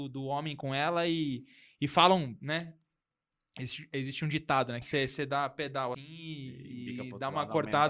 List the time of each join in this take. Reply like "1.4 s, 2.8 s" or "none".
4.8 s, 5.9 s

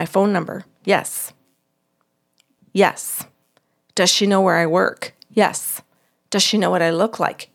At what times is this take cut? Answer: 2.6 s

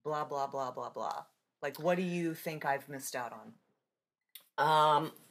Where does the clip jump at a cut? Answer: none

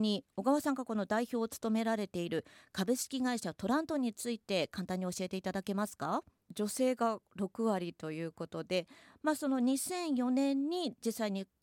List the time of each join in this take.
6.5 s

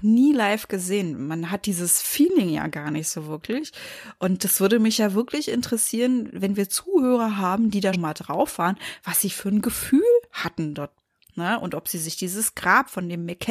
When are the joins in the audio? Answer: 7.9 s

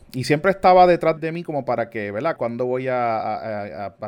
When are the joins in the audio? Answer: 1.2 s, 2.4 s

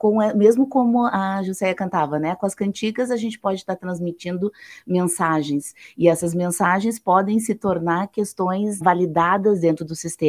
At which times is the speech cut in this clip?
8.8 s

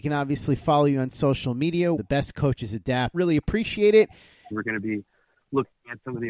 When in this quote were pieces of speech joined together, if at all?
2.0 s, 3.1 s, 4.5 s

